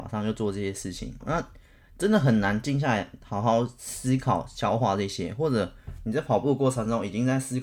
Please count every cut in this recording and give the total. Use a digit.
1